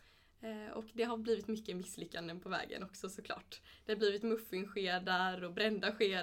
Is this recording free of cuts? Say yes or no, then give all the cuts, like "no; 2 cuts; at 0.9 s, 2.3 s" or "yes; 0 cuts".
yes; 0 cuts